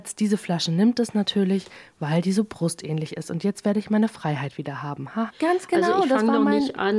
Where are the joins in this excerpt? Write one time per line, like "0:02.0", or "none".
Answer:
0:05.3